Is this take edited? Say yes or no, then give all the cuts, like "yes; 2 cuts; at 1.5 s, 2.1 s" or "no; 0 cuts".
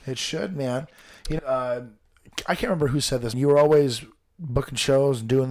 yes; 2 cuts; at 1.4 s, 3.3 s